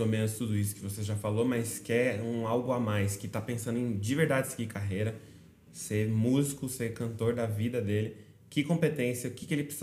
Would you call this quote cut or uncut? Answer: uncut